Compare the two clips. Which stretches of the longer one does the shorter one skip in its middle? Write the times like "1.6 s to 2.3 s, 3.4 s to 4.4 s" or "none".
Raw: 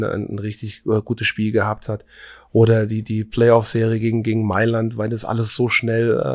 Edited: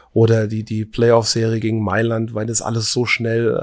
4.0 s to 4.2 s